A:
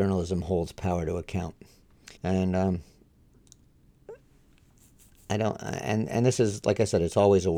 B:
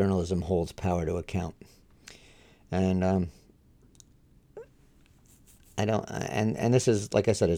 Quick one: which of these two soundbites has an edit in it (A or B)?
A